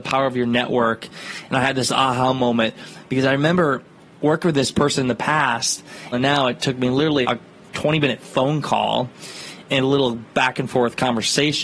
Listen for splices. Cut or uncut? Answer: cut